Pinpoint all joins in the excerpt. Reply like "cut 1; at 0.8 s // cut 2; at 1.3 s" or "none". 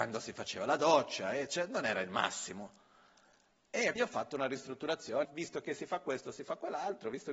cut 1; at 4.0 s // cut 2; at 5.2 s